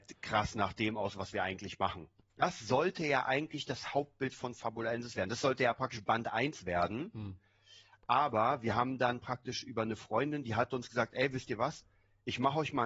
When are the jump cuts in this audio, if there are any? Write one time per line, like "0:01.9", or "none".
0:02.3

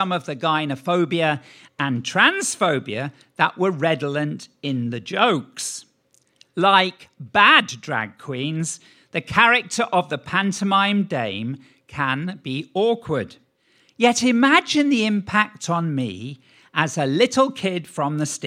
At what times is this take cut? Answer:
none

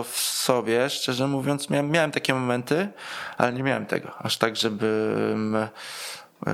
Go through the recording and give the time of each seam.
none

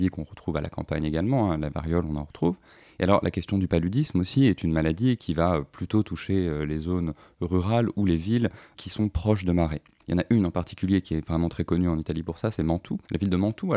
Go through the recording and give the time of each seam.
none

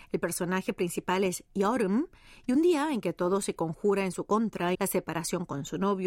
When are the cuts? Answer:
0:04.7

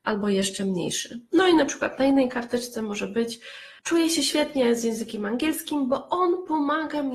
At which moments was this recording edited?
0:03.8

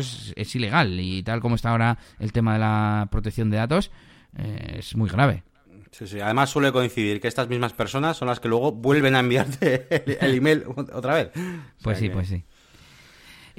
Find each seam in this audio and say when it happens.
none

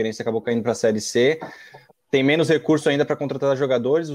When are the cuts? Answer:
none

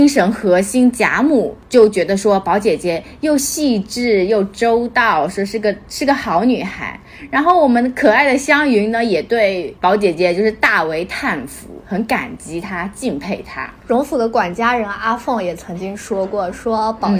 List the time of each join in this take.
none

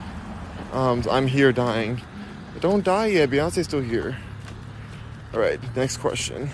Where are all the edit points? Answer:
0:01.0

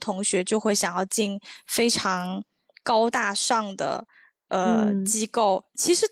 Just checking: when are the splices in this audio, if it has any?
none

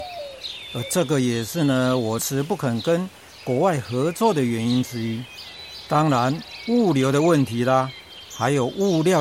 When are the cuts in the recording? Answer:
0:02.2

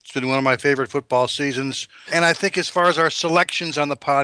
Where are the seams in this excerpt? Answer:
0:02.1

